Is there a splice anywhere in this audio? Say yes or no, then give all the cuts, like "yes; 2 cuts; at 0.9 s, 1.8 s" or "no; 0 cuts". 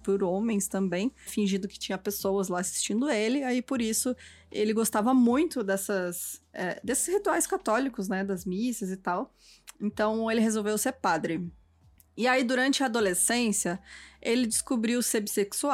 yes; 1 cut; at 1.3 s